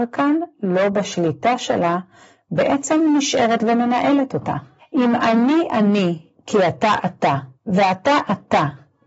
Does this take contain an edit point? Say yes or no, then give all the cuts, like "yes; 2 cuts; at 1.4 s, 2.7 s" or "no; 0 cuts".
yes; 2 cuts; at 4.8 s, 7.5 s